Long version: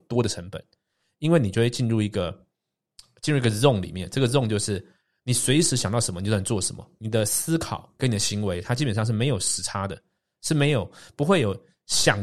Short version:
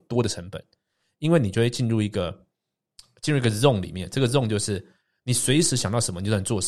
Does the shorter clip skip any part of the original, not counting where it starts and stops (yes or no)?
no